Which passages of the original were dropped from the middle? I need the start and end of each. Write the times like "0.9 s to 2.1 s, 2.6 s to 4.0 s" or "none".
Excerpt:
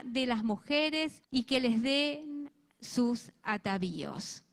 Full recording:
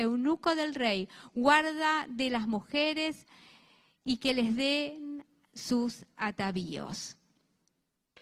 3.3 s to 4.0 s